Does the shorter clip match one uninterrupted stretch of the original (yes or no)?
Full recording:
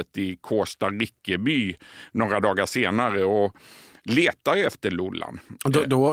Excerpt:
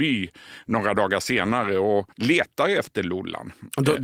no